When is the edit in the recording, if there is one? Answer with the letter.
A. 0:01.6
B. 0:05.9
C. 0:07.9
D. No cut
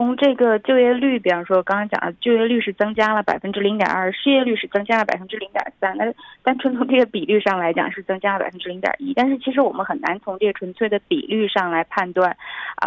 C